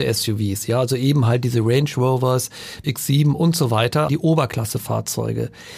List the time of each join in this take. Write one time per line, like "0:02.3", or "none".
0:02.8
0:04.1